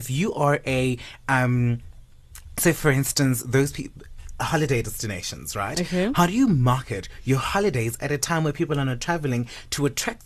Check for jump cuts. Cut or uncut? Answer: uncut